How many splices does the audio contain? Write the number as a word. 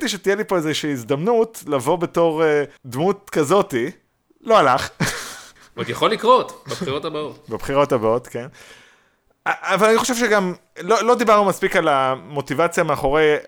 two